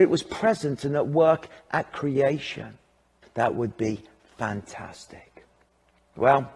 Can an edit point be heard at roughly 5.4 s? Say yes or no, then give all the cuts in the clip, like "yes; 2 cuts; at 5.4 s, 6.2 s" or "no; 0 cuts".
no; 1 cut; at 3.2 s